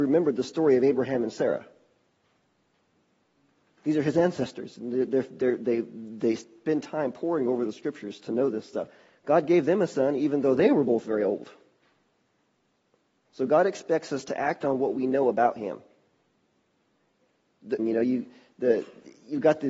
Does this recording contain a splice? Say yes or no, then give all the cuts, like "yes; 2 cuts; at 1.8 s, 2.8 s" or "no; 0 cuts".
yes; 2 cuts; at 13.2 s, 17.8 s